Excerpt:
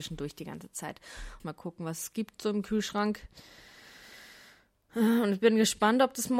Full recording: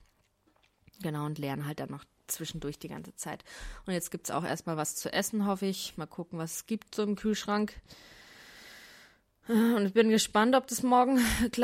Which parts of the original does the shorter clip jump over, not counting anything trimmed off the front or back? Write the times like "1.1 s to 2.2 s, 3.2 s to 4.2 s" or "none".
3.8 s to 5.9 s

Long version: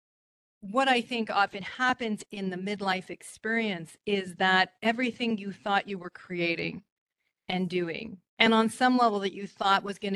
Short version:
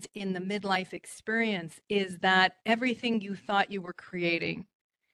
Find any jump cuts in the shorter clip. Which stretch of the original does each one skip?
none

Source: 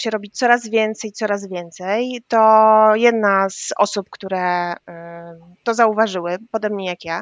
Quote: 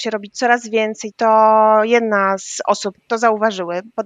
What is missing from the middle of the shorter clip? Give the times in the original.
1.1 s to 2.2 s, 4.1 s to 5.5 s

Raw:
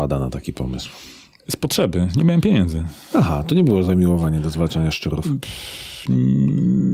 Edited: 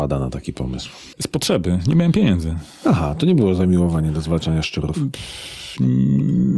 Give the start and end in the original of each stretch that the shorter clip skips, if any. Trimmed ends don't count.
1.1 s to 1.4 s

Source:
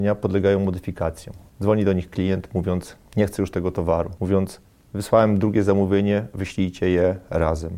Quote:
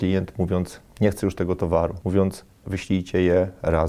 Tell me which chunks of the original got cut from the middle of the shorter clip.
4.8 s to 6.3 s

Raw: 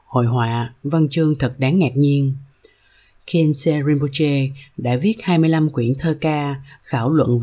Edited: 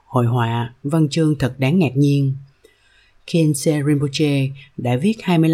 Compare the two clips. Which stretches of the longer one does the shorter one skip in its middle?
none

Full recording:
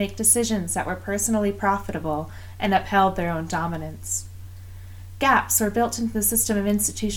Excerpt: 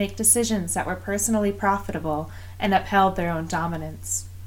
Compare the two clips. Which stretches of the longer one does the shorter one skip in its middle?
none

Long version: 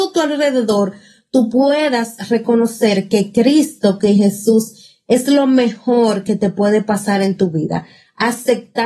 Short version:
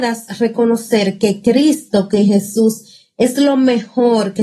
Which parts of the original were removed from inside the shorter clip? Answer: none

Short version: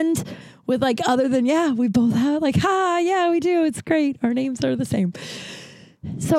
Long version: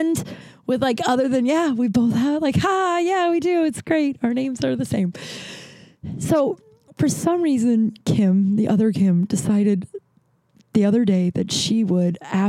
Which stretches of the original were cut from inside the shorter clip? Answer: none

